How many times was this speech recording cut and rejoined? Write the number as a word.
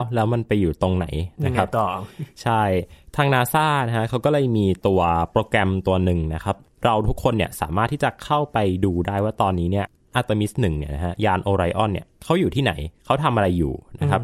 zero